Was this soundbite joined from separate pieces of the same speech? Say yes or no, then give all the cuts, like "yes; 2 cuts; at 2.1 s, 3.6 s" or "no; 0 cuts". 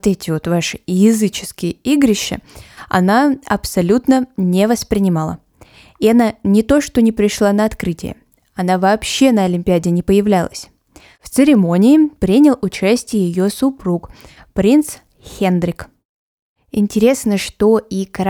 no; 0 cuts